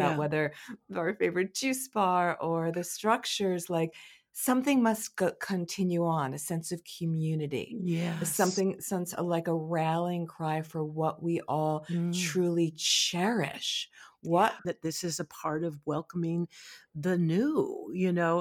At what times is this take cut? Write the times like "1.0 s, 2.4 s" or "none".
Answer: 14.6 s